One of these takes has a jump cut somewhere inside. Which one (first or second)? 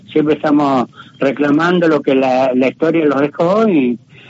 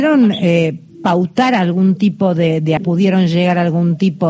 second